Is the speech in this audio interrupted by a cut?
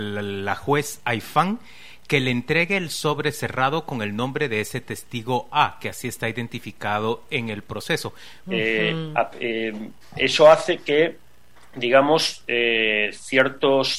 yes; 1 cut; at 8.4 s

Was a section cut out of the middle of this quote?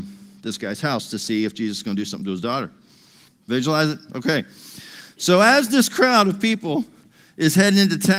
yes; 1 cut; at 3.3 s

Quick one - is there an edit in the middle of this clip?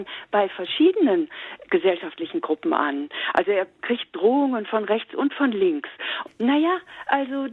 yes; 1 cut; at 6.3 s

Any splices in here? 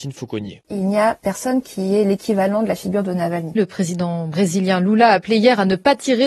yes; 1 cut; at 3.6 s

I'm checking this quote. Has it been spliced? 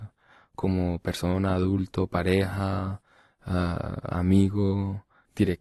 no; 0 cuts

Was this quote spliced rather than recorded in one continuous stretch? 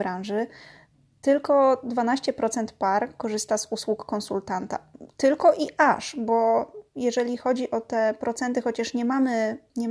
no; 0 cuts

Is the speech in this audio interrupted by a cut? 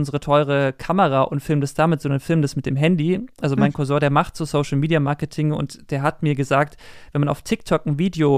no; 0 cuts

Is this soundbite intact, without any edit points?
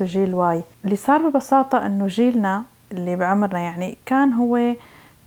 yes; 0 cuts

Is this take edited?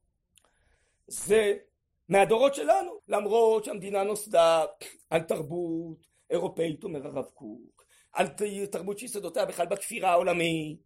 yes; 1 cut; at 3.0 s

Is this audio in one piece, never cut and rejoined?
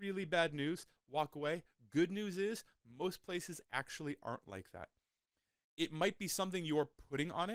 yes; 0 cuts

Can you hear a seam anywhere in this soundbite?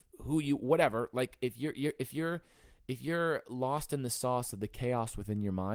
no; 0 cuts

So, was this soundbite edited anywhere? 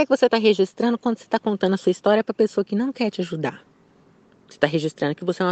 no; 0 cuts

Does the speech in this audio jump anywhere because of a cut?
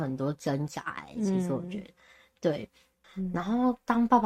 yes; 1 cut; at 3.0 s

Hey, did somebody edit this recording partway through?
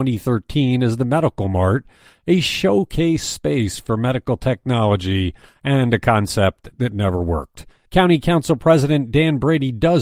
yes; 1 cut; at 7.9 s

